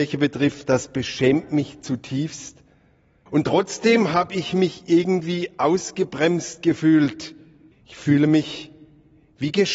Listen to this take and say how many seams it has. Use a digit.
2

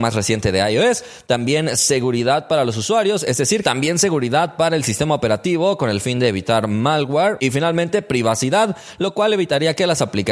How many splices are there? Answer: 1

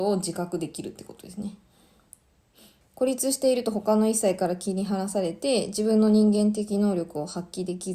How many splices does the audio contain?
1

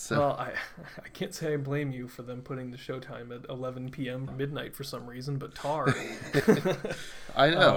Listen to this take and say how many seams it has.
1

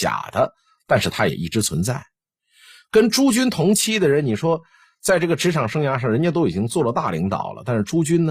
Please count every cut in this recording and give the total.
0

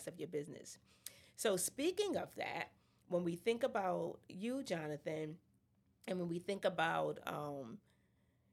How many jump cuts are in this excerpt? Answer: 0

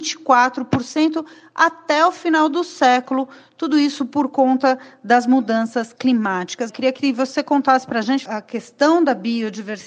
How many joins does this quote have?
2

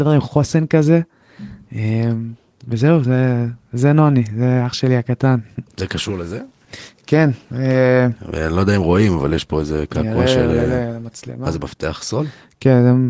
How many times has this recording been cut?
0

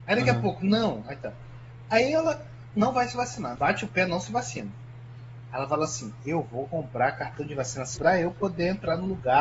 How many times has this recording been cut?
2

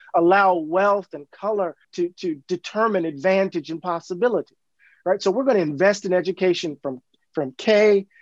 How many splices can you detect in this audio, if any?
1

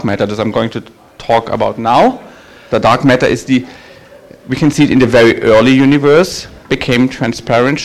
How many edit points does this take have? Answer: 2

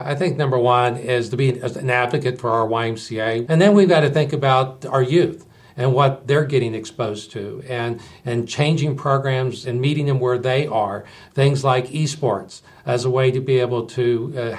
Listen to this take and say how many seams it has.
1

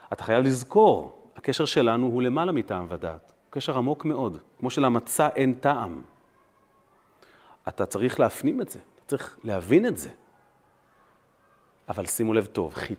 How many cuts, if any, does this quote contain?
0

